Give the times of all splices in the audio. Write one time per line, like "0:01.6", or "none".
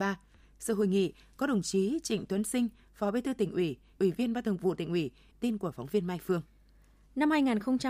0:04.0
0:05.3